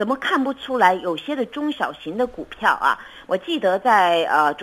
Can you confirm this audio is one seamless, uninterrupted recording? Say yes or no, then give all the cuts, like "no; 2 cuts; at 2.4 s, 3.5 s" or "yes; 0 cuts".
no; 1 cut; at 3.3 s